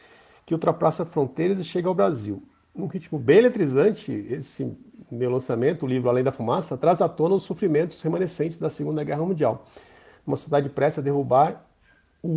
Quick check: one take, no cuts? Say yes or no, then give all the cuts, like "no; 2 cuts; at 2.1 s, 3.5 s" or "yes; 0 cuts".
yes; 0 cuts